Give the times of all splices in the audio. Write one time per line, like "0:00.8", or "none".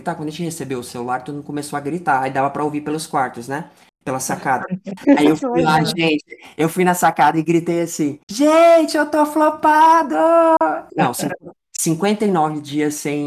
0:08.2
0:10.9

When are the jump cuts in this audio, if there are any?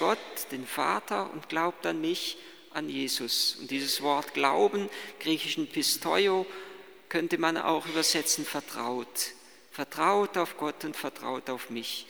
none

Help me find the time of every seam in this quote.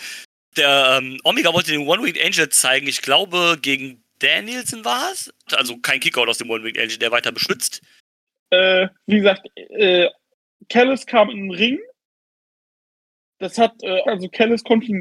0:05.5
0:08.3
0:14.0

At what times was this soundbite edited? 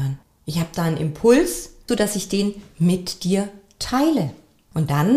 0:01.9

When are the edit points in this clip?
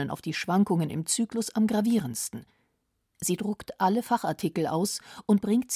0:03.1

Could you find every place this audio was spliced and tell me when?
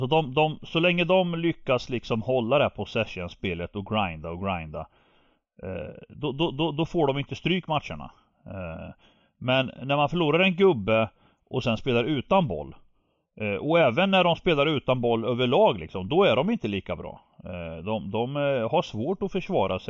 none

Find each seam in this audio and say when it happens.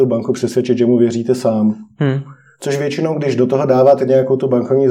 none

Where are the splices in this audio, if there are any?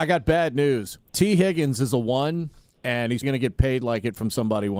0:01.1
0:03.2

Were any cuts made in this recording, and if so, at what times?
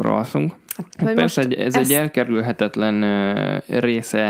0:00.9

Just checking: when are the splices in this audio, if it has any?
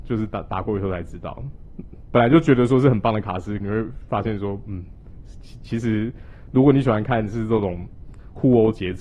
0:02.1
0:03.6

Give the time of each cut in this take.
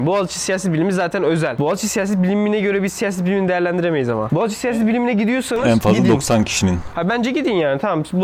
0:04.3

